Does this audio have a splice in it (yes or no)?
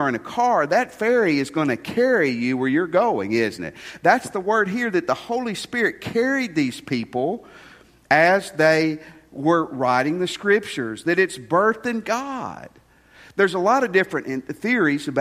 no